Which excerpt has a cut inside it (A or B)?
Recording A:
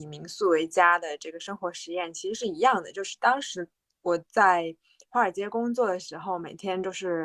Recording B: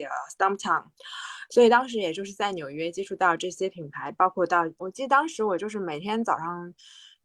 B